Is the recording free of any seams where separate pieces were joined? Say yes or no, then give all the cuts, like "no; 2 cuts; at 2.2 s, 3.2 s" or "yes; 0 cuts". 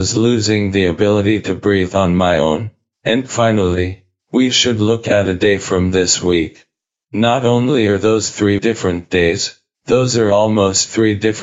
no; 1 cut; at 8.6 s